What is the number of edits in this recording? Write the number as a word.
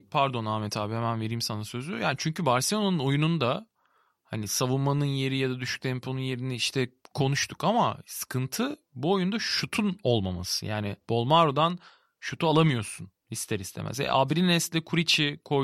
zero